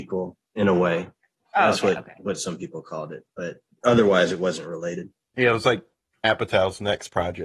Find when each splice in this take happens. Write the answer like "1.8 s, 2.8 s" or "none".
none

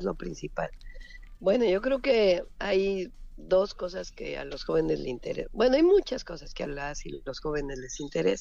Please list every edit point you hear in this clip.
1.4 s

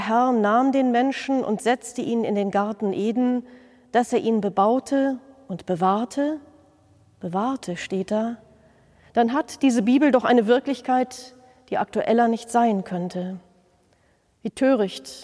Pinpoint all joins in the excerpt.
none

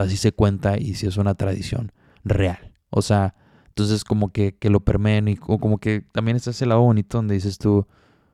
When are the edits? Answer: none

